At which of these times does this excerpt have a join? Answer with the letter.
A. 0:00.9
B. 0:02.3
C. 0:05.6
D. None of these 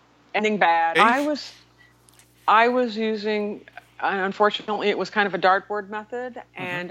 A